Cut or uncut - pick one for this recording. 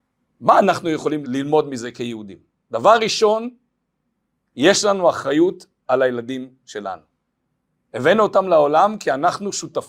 cut